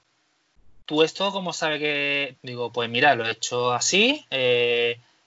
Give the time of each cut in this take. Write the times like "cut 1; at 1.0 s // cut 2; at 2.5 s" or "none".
cut 1; at 2.4 s